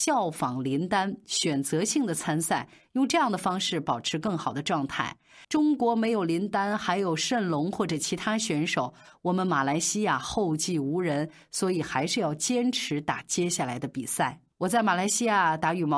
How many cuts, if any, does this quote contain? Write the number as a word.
two